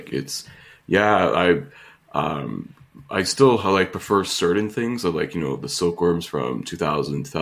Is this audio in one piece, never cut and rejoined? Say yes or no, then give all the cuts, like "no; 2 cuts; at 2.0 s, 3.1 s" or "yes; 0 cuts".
yes; 0 cuts